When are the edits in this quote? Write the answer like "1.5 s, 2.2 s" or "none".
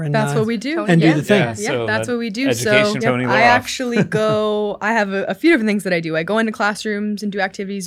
3.0 s